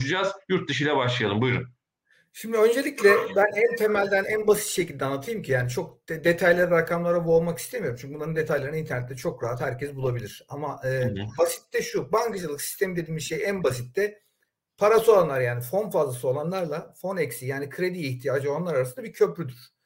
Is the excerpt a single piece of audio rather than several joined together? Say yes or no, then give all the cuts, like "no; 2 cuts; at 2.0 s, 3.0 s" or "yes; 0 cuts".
yes; 0 cuts